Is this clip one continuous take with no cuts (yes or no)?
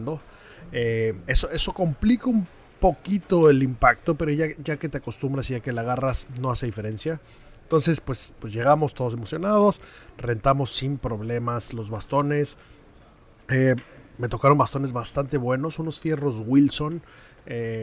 yes